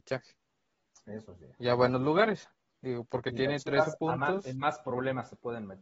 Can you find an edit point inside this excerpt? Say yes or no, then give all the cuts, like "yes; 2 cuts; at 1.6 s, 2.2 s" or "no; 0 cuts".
no; 0 cuts